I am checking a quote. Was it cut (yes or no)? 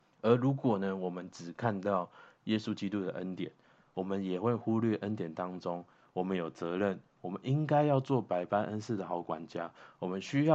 no